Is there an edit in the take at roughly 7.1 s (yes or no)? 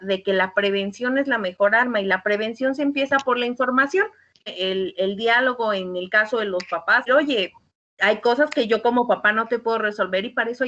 yes